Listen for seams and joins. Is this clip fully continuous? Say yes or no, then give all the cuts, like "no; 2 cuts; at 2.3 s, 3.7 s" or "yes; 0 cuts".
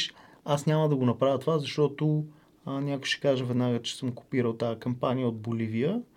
yes; 0 cuts